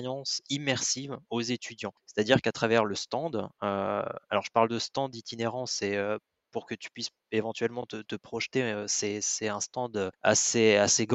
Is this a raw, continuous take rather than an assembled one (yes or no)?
yes